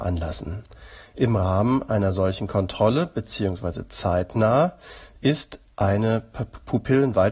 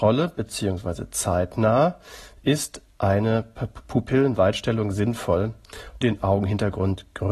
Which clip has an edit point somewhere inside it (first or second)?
second